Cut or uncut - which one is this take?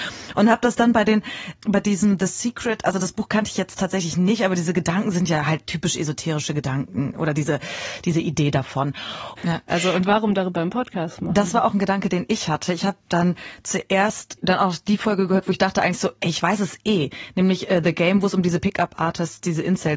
cut